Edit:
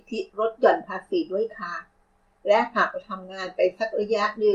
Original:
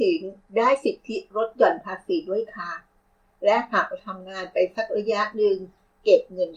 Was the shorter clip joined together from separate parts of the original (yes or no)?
no